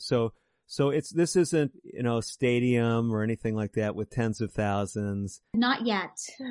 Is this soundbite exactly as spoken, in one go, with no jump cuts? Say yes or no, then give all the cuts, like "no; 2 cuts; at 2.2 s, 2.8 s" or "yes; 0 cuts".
no; 1 cut; at 1.7 s